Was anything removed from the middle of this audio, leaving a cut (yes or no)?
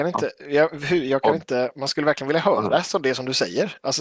no